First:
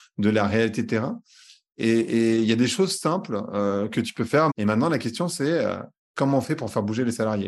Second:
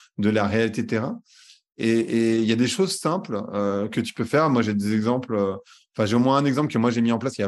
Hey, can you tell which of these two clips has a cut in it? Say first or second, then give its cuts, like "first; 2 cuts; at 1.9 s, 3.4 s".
first; 1 cut; at 4.5 s